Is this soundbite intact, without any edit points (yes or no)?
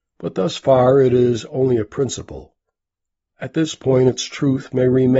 yes